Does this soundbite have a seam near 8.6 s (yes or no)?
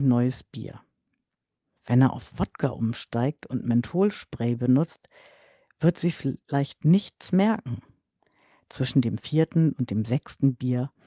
no